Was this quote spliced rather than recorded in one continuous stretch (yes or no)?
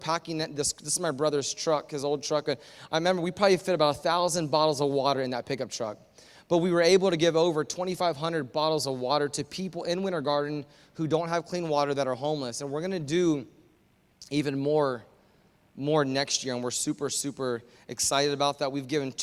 no